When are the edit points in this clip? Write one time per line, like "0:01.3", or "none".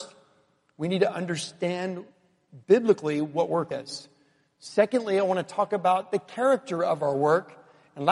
0:03.7